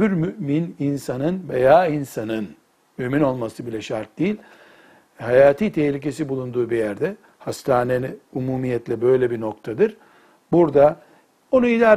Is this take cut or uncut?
uncut